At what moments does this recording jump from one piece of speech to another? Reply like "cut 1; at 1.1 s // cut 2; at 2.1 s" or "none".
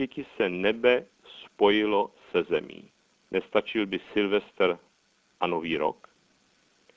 cut 1; at 3.2 s